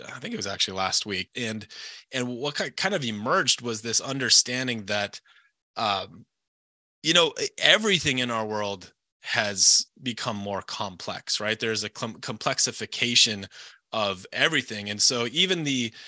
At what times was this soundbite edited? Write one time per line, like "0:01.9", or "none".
0:01.3